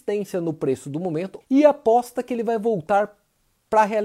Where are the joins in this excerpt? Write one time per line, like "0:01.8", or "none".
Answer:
0:01.4